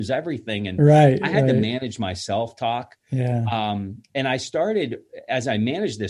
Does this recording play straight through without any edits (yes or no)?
yes